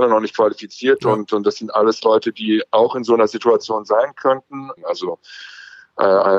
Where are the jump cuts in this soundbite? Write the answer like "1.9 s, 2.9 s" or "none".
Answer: 4.8 s